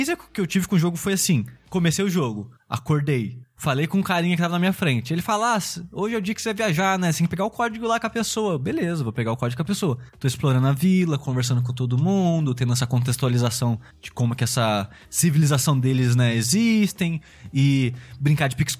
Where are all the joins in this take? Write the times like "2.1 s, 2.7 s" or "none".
none